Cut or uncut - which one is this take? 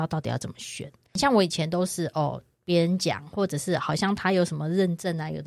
uncut